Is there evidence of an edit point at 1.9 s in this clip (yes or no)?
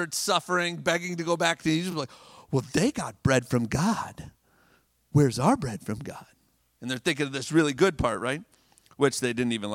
no